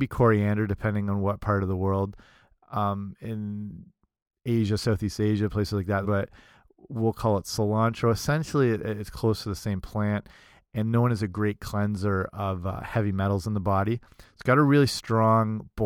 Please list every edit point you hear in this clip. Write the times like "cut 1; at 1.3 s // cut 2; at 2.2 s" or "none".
cut 1; at 6.0 s